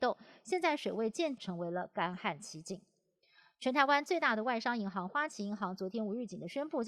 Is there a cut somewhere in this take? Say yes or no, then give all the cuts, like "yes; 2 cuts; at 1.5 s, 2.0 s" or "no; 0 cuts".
yes; 1 cut; at 1.4 s